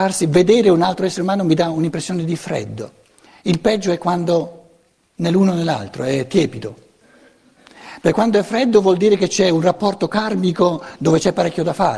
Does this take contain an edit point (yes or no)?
no